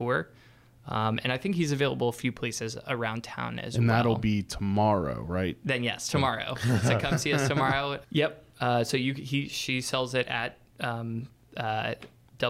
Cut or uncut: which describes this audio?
cut